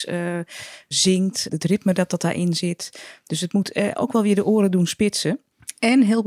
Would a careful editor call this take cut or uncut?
uncut